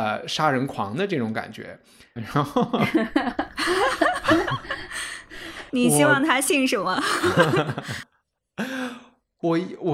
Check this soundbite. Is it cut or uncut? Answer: cut